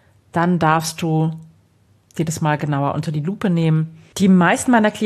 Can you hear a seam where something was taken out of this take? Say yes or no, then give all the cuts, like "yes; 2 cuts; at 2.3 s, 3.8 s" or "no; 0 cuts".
yes; 1 cut; at 4.1 s